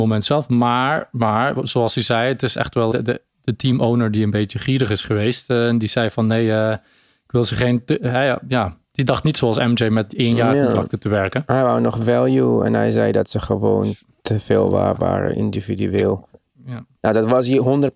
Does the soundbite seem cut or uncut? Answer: cut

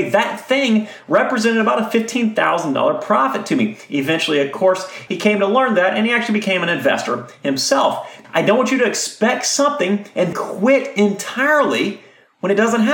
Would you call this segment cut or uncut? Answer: cut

